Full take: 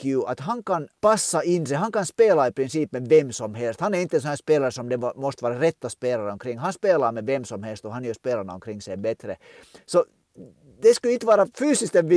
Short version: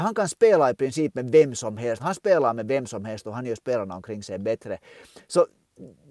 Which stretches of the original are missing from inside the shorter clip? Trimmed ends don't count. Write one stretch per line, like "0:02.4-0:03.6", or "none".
0:03.8-0:06.6